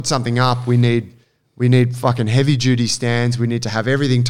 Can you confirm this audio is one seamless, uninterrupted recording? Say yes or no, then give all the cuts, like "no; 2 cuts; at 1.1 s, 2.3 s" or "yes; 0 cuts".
yes; 0 cuts